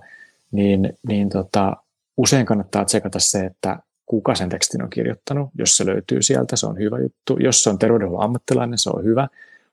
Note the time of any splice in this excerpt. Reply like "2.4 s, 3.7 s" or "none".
none